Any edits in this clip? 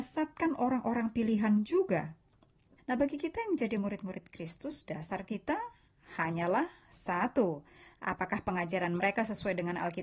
yes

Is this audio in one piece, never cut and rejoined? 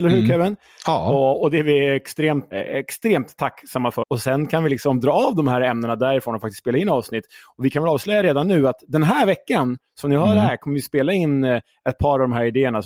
no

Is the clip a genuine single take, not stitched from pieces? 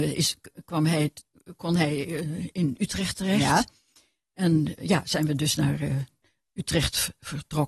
yes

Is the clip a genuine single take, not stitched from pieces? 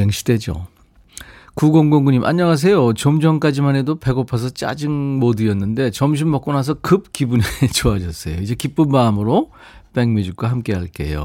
yes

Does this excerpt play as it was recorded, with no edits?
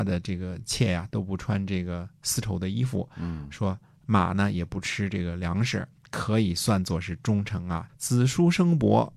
no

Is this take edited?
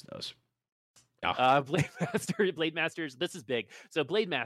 yes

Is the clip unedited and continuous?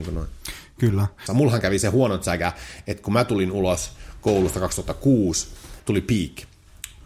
no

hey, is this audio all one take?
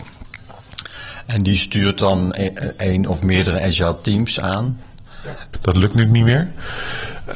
no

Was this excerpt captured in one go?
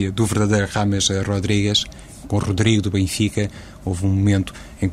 no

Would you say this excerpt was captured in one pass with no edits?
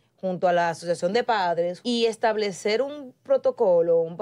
no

